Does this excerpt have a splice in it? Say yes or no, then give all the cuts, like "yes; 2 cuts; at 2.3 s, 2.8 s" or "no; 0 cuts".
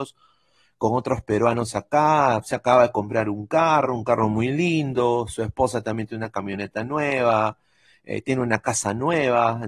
no; 0 cuts